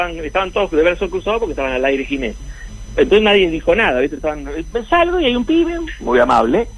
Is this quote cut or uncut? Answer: uncut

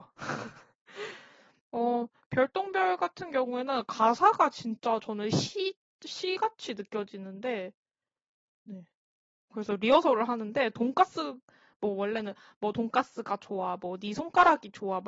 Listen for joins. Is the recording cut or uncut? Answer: cut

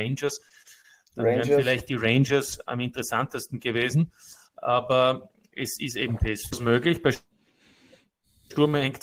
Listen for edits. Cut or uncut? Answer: uncut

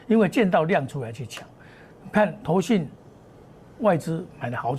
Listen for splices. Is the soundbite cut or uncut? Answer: uncut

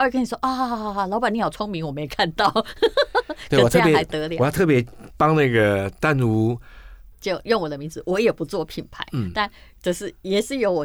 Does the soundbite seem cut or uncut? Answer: cut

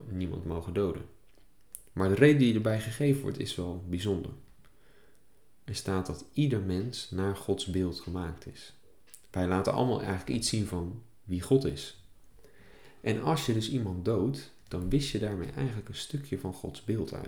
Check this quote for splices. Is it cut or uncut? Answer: uncut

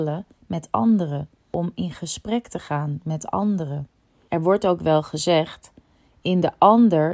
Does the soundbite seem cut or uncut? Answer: uncut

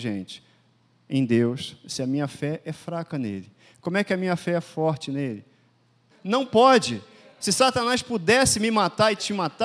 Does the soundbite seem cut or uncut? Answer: cut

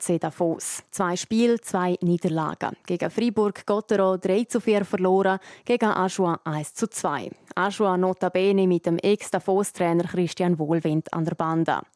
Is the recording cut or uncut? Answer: uncut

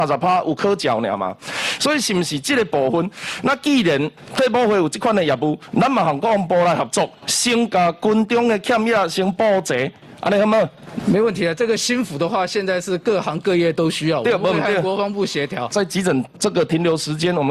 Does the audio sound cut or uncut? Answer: cut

